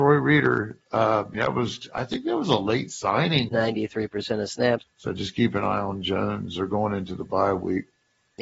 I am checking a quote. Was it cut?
yes; 3 cuts; at 1.3 s, 3.5 s, 4.8 s

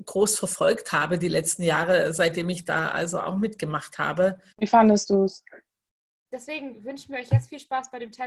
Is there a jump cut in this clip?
yes; 2 cuts; at 4.5 s, 6.3 s

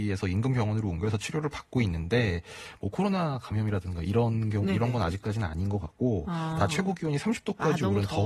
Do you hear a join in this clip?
no; 0 cuts

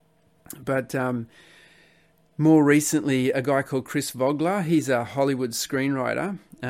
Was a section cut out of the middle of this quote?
no; 0 cuts

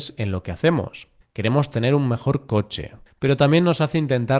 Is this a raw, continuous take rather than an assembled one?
no; 2 cuts; at 1.2 s, 3.1 s

